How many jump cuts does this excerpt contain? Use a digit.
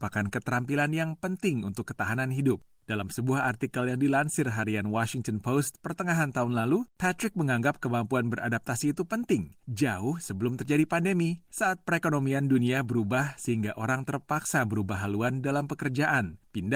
0